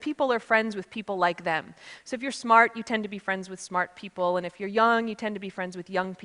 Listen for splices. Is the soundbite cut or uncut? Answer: uncut